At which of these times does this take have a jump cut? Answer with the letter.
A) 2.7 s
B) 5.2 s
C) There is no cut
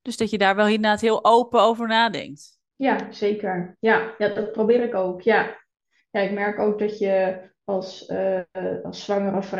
A